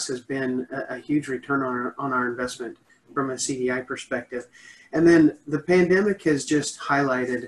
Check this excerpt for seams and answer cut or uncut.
uncut